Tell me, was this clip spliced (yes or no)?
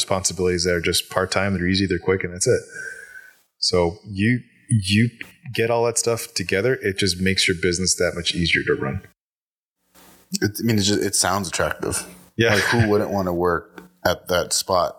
no